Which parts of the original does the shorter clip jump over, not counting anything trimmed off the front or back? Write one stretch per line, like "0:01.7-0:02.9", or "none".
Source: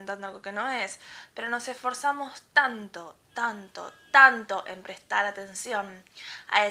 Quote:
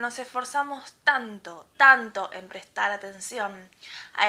0:03.2-0:04.1